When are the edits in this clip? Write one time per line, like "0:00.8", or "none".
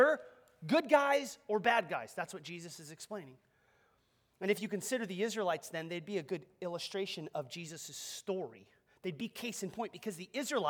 none